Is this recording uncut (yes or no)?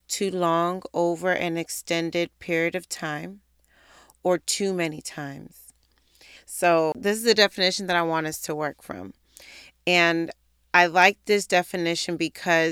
no